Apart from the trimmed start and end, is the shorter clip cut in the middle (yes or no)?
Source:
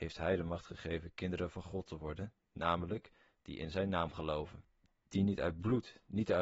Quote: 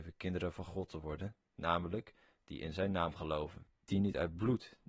yes